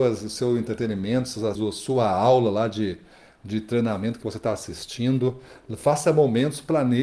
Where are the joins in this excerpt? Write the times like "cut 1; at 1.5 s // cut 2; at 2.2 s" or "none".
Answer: cut 1; at 1.6 s